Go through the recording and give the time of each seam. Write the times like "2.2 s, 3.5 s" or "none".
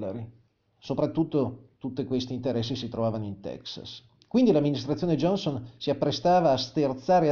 none